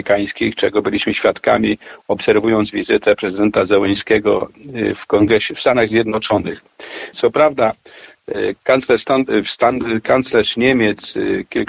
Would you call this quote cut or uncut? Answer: cut